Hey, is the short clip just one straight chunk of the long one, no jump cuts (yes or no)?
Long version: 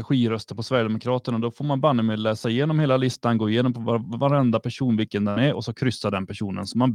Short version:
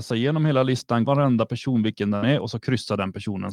no